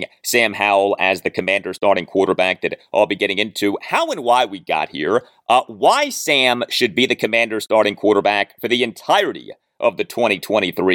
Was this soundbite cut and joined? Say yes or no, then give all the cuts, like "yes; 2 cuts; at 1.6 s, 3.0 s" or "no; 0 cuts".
no; 0 cuts